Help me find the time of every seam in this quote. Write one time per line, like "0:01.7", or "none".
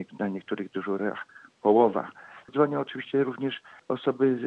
0:02.4